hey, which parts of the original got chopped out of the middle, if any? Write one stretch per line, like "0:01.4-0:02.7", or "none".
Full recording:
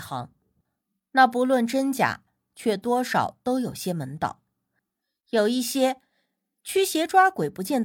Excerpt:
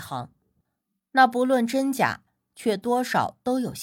none